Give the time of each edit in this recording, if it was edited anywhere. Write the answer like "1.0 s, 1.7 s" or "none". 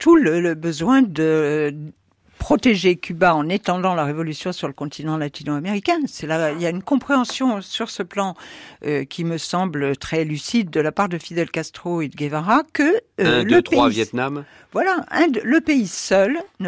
none